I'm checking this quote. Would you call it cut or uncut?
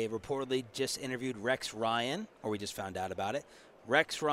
uncut